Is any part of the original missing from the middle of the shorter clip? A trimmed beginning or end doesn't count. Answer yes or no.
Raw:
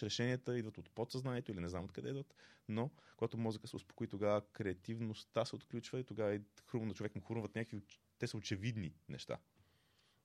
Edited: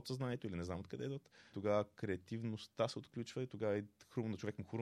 yes